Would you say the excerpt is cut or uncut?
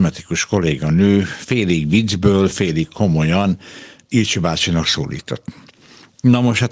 uncut